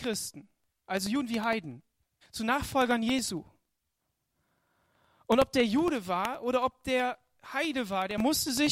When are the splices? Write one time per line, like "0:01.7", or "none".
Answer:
0:02.2